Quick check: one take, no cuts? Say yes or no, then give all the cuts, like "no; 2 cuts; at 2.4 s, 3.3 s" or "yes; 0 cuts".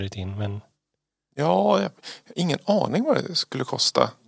yes; 0 cuts